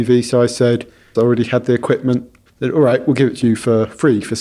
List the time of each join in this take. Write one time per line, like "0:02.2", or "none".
0:01.1
0:02.5